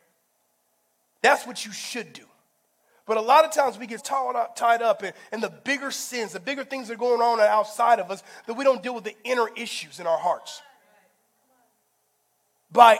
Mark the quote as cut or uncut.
cut